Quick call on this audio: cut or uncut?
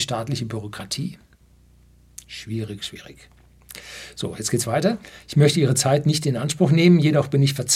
cut